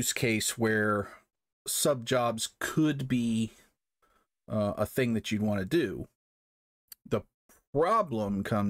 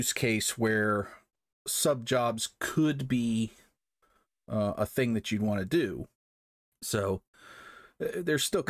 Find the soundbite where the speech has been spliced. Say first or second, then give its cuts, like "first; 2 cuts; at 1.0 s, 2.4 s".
second; 1 cut; at 6.7 s